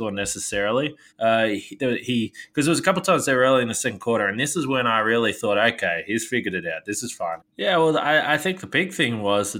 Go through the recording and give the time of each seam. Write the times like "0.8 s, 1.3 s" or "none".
1.1 s, 7.4 s